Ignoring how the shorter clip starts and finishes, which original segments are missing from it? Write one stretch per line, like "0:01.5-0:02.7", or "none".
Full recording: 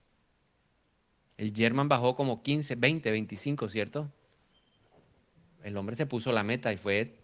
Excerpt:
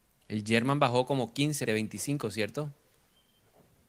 0:02.7-0:03.0